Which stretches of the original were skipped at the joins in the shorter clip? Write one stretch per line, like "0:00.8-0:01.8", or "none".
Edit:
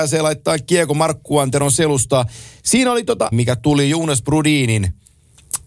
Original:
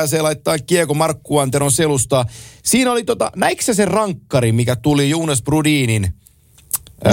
0:03.3-0:04.5